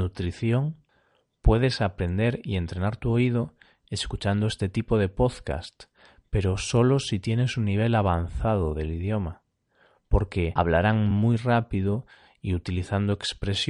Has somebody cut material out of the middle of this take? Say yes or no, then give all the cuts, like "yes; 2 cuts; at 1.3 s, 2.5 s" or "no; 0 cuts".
no; 0 cuts